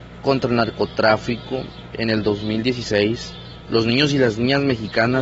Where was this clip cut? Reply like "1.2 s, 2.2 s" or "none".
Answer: none

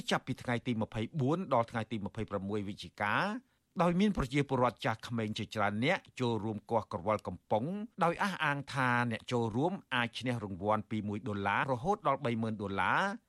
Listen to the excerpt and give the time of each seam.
7.9 s, 11.6 s

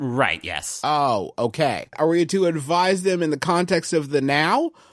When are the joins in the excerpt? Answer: 1.9 s

